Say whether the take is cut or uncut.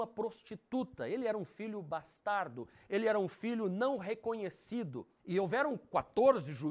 cut